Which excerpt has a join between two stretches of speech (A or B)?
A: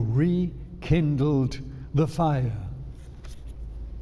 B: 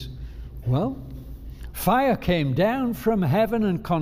B